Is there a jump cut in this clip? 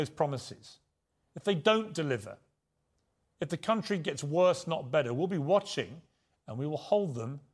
no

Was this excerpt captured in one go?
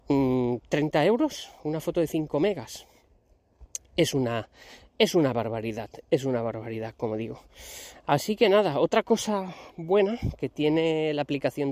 yes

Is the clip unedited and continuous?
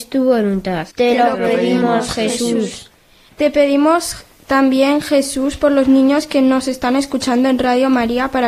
no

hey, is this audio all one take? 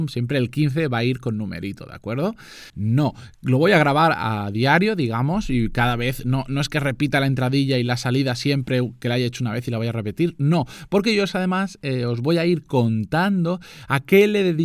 no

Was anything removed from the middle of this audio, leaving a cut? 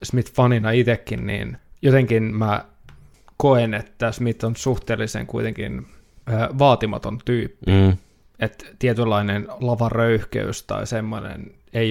no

